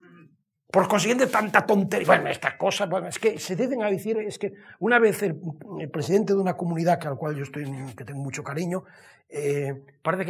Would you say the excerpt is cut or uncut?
uncut